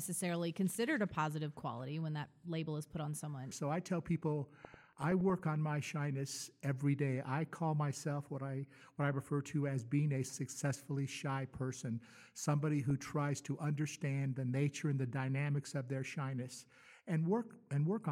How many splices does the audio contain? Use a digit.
1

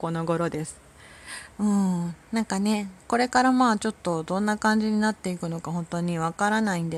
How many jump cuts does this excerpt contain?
1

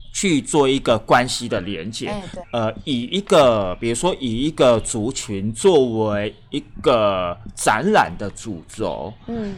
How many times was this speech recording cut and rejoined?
1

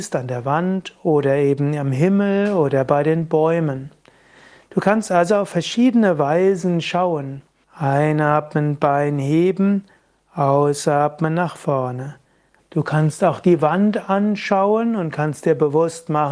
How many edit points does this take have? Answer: 2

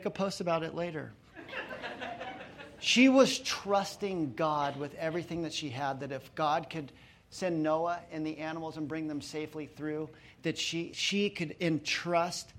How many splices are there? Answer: 1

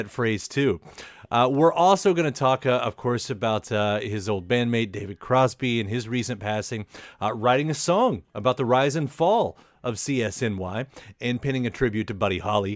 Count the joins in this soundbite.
0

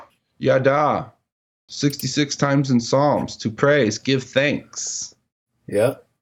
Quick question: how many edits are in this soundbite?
2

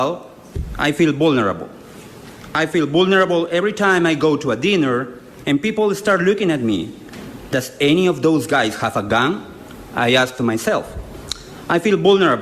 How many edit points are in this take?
1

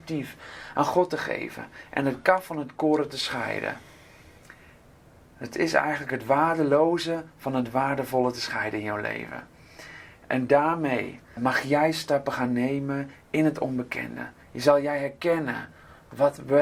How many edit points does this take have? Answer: 1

